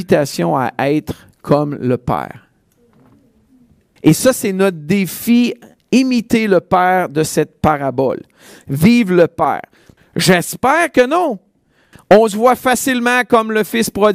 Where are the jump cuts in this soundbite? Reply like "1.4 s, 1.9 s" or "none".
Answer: 4.0 s, 10.0 s, 11.9 s